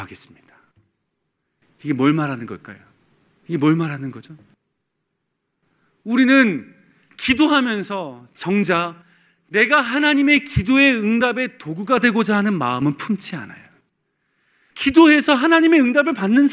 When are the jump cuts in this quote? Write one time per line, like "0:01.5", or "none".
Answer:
0:14.7